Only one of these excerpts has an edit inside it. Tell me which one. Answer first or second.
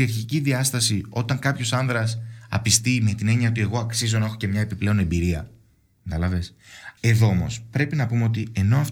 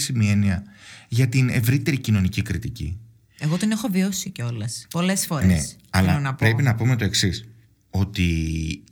first